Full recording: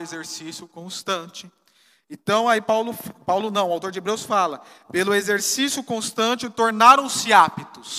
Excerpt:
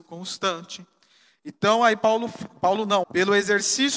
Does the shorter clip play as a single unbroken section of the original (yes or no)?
no